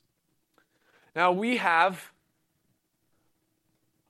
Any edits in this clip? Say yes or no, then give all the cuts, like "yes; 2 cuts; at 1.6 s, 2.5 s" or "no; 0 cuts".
no; 0 cuts